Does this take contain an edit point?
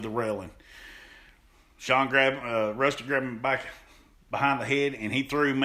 no; 0 cuts

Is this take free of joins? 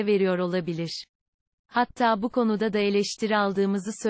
yes; 0 cuts

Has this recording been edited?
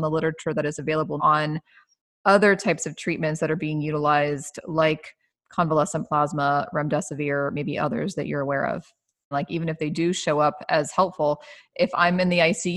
yes; 2 cuts; at 1.2 s, 9.3 s

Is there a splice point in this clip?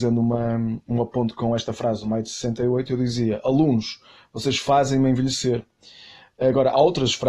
no; 0 cuts

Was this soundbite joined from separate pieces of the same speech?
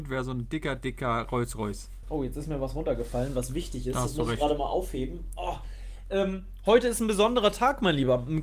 yes; 1 cut; at 2.0 s

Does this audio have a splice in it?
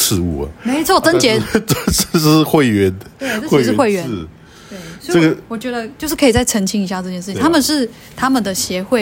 no; 0 cuts

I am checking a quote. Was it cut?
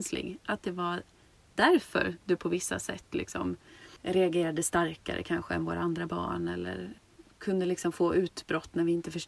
no; 0 cuts

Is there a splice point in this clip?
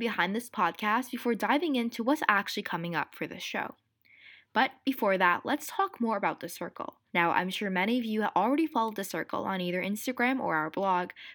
yes; 1 cut; at 7.1 s

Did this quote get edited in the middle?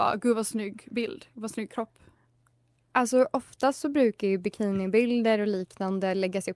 no; 0 cuts

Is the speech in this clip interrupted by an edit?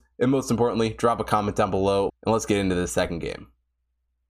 yes; 1 cut; at 2.1 s

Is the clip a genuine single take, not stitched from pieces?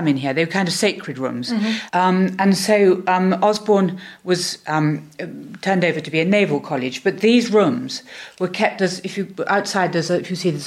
no; 1 cut; at 1.9 s

